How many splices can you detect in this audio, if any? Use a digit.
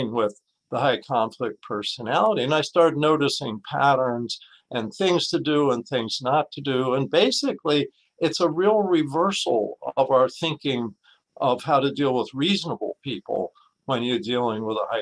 0